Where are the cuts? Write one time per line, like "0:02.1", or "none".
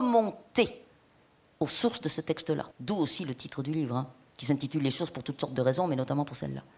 0:02.7